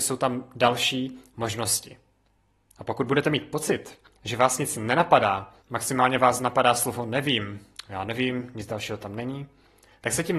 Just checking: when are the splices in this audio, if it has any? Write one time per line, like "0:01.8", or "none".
0:05.6

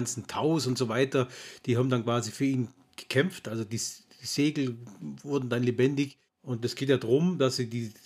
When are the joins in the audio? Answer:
none

